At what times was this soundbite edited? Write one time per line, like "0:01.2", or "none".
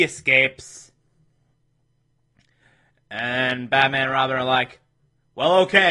none